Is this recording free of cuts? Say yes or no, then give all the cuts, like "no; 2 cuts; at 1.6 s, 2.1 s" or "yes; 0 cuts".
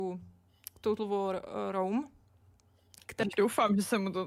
no; 1 cut; at 3.2 s